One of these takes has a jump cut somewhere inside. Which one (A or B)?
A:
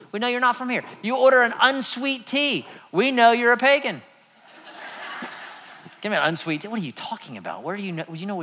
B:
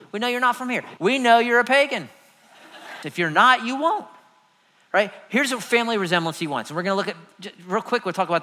B